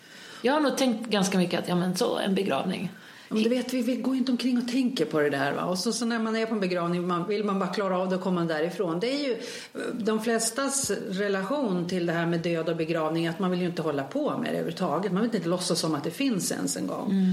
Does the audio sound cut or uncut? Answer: uncut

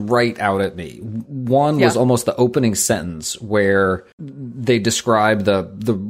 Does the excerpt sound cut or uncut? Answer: cut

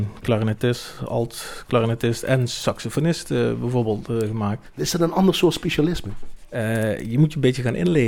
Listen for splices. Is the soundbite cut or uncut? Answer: uncut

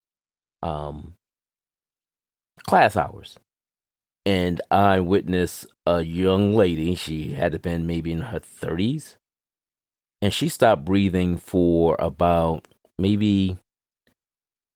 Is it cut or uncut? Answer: uncut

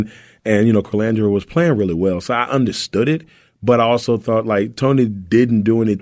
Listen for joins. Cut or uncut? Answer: uncut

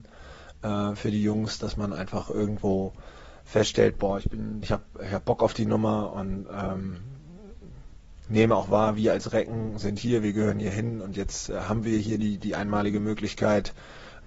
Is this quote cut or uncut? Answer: cut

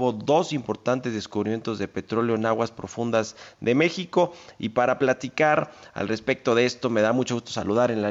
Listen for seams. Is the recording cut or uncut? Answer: uncut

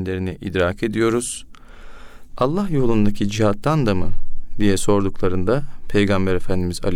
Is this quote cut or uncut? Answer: cut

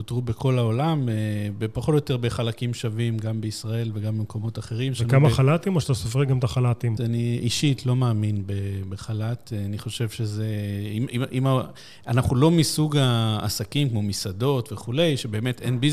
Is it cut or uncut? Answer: cut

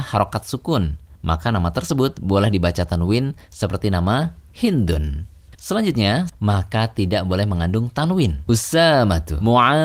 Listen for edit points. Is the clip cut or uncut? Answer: cut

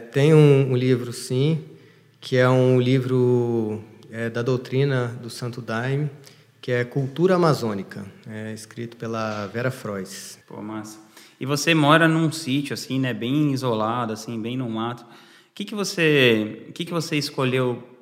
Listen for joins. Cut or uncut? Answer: cut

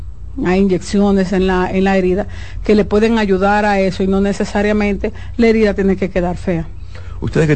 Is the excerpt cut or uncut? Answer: uncut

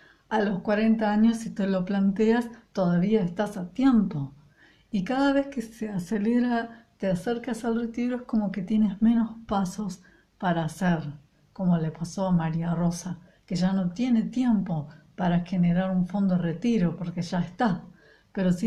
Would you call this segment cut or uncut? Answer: uncut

